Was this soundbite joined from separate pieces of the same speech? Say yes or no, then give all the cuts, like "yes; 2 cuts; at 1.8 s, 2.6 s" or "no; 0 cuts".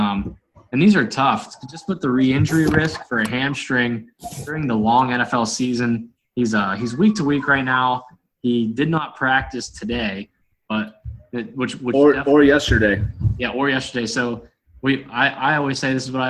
yes; 1 cut; at 10.5 s